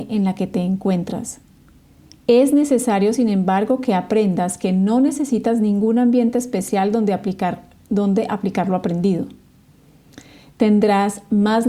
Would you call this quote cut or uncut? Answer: uncut